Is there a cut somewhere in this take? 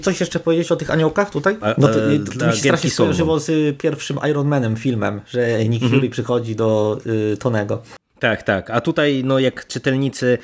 yes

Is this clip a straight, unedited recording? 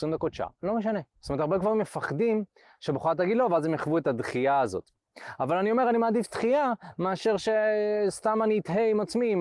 no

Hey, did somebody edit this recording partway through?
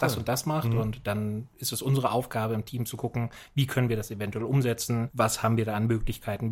no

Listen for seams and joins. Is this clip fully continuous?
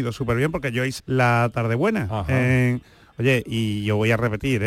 no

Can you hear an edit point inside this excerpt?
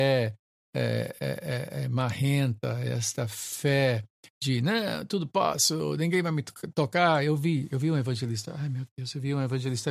no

